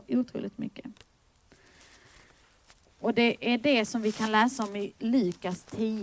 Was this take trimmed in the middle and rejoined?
yes; 1 cut; at 2.8 s

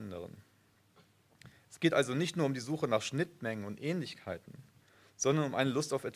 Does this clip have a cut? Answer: no; 0 cuts

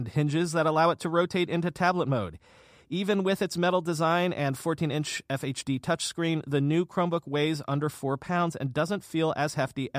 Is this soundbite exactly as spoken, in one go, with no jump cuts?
yes; 0 cuts

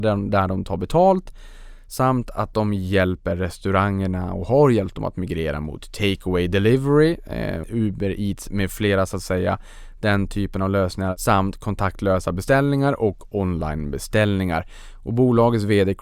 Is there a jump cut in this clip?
yes; 1 cut; at 7.6 s

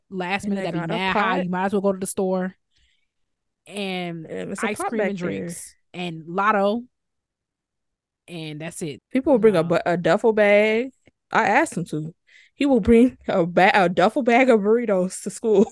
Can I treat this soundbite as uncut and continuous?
no; 2 cuts; at 9.0 s, 11.3 s

